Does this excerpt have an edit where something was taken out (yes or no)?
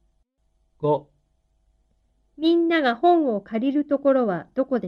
no